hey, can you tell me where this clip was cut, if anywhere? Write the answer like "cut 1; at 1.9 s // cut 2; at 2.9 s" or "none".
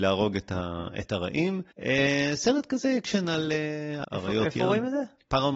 cut 1; at 1.7 s // cut 2; at 4.0 s